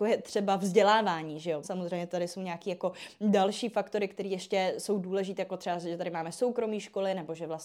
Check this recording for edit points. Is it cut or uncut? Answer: cut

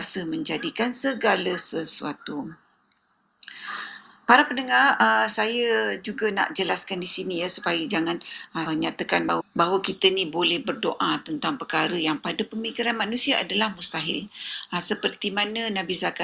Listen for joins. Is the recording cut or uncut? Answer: cut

